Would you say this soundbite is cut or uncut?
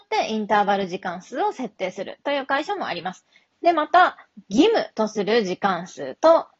cut